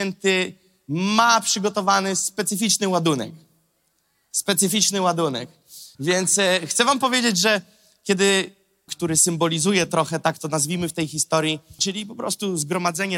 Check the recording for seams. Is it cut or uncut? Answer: cut